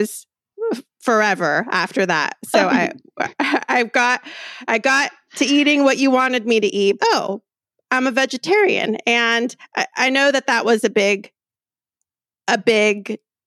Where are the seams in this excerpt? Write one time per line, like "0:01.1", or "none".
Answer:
0:07.0